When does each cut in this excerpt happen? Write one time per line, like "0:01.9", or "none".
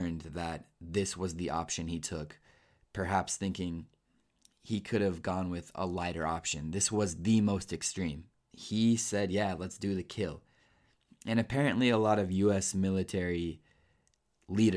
0:08.3